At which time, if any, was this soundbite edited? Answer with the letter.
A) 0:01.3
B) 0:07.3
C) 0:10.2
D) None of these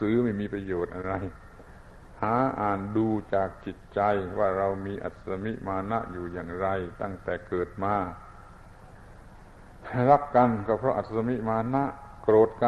D